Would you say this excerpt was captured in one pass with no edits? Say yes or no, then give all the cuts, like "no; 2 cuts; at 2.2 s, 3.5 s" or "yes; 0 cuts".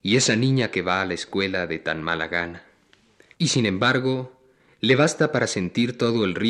no; 1 cut; at 3.3 s